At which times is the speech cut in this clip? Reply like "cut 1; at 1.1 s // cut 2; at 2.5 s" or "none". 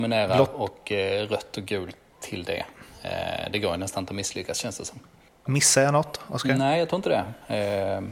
cut 1; at 5.5 s

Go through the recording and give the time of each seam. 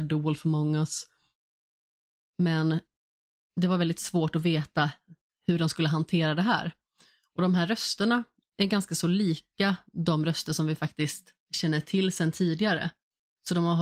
cut 1; at 11.4 s

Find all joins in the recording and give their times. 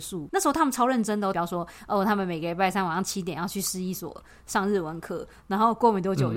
cut 1; at 1.3 s

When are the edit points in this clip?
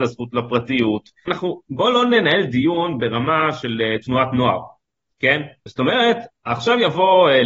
cut 1; at 1.3 s // cut 2; at 5.7 s

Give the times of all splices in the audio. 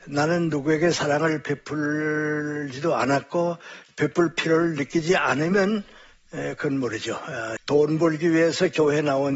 cut 1; at 7.6 s

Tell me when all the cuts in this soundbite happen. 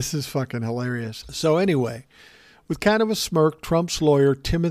cut 1; at 1.2 s

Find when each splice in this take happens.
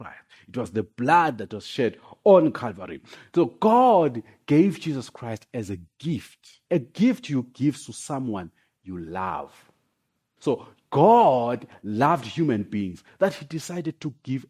cut 1; at 6.6 s // cut 2; at 10.4 s

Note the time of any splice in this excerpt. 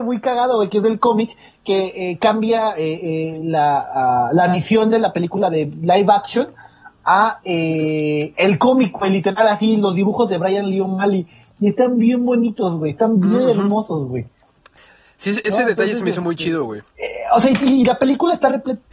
none

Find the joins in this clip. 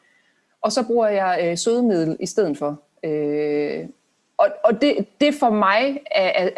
none

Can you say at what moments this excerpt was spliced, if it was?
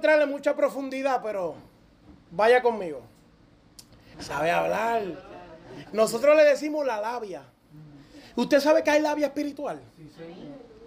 cut 1; at 4.1 s

